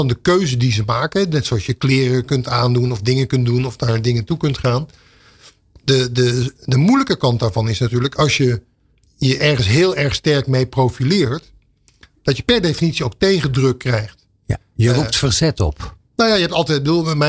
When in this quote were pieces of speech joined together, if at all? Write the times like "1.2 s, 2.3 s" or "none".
none